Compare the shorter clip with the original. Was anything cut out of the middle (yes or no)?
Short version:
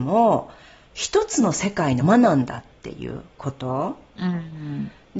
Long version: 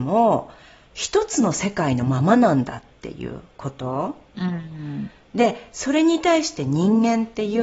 yes